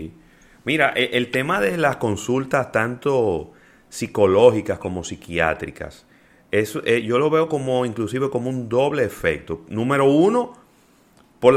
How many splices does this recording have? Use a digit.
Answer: 0